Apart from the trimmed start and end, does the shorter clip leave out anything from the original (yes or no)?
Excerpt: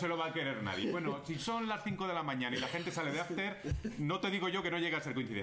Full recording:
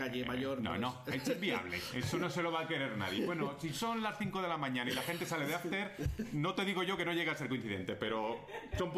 no